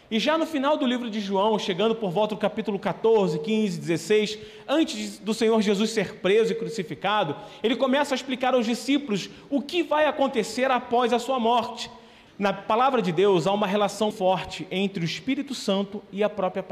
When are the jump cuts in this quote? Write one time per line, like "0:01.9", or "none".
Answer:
0:12.3
0:14.1